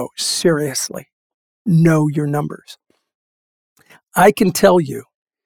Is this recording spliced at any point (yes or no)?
no